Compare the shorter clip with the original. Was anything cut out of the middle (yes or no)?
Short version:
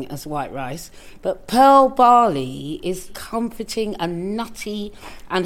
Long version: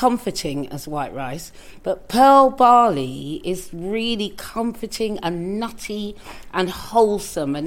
yes